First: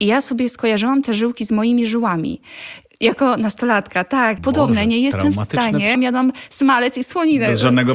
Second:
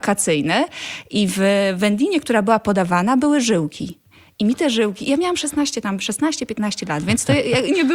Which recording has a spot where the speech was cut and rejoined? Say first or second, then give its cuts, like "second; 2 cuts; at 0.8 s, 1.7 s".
first; 2 cuts; at 4.4 s, 6.0 s